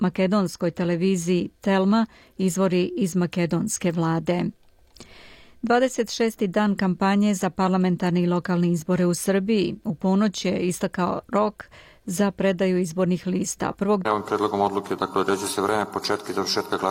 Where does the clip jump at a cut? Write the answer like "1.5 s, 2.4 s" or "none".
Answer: 14.0 s